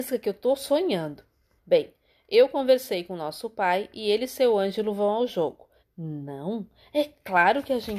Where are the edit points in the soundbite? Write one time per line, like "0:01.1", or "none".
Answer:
0:01.6
0:05.8